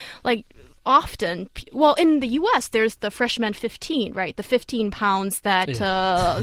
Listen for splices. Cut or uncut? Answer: uncut